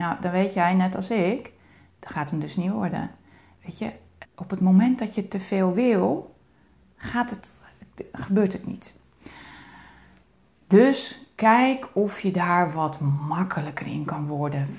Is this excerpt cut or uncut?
cut